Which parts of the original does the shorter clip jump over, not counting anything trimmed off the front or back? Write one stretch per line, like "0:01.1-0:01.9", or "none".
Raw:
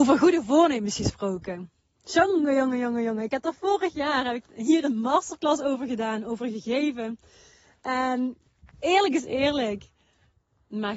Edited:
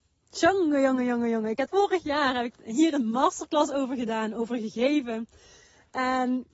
0:03.4-0:03.6